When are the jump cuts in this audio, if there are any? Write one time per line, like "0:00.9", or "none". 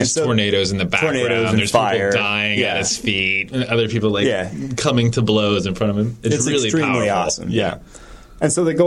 none

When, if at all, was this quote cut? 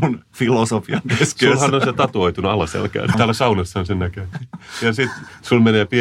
0:03.1
0:04.3

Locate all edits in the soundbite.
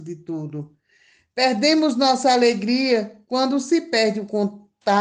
none

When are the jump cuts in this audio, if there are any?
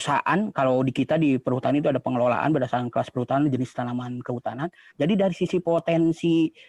0:04.9

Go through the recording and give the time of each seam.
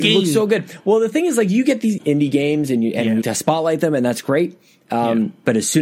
0:02.0
0:03.2

